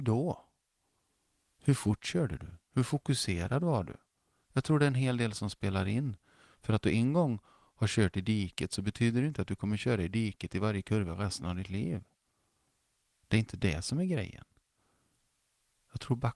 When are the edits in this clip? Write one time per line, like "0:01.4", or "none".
none